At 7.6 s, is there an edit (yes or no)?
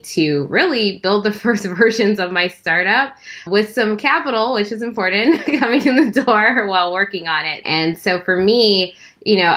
yes